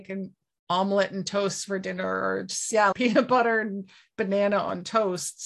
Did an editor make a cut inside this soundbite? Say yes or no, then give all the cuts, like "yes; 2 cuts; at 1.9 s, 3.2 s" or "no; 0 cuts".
yes; 1 cut; at 2.9 s